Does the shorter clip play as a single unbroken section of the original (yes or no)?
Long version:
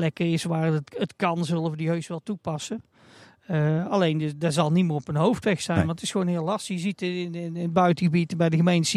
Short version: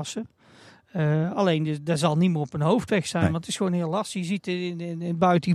yes